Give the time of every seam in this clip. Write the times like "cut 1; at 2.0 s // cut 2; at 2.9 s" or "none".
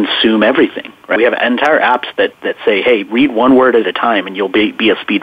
cut 1; at 1.2 s